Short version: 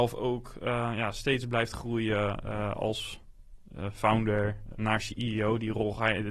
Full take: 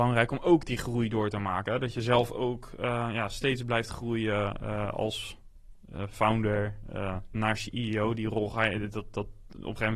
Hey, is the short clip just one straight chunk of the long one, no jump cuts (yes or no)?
no